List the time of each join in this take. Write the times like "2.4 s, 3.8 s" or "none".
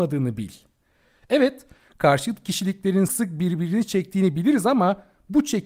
3.1 s